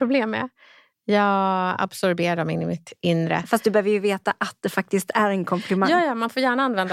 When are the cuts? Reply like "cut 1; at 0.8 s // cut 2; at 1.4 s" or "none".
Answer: none